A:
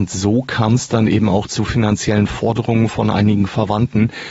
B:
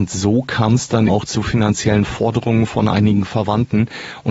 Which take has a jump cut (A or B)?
B